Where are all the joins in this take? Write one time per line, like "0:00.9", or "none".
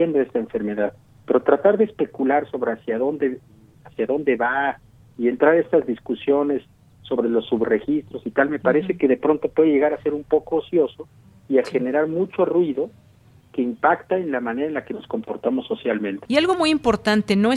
0:16.2

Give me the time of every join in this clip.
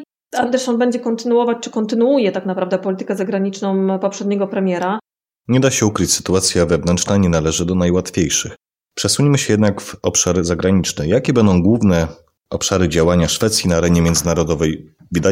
0:05.3

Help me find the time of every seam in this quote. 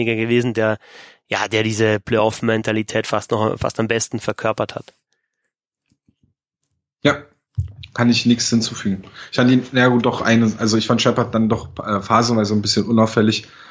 none

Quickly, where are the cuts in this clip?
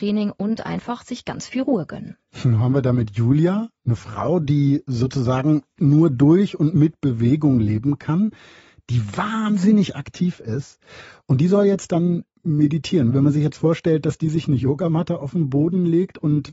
none

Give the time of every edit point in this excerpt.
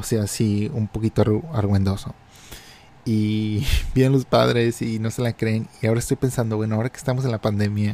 none

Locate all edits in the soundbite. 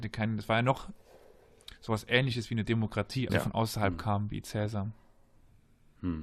0:03.3

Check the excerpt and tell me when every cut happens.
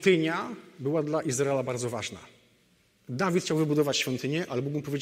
none

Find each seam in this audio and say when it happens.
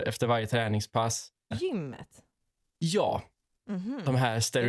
0:01.5
0:03.6

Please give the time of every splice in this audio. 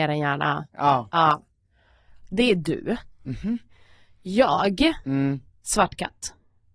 none

